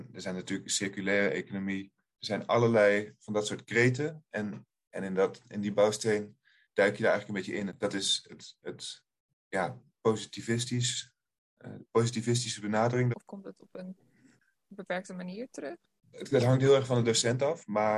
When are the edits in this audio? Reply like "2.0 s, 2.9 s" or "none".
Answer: 7.7 s, 13.1 s, 16.1 s